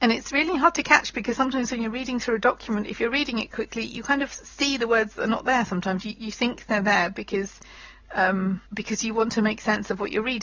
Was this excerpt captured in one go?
no; 1 cut; at 8.7 s

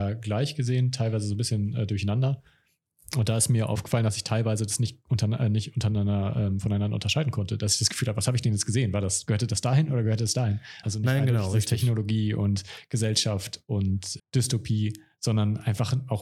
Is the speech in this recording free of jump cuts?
no; 2 cuts; at 10.8 s, 14.2 s

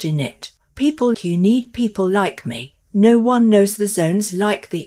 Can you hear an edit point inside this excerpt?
yes; 1 cut; at 1.1 s

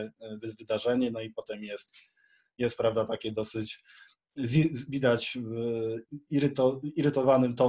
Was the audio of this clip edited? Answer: no; 0 cuts

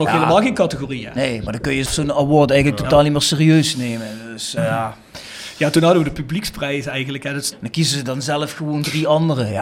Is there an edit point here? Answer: yes; 2 cuts; at 4.6 s, 7.5 s

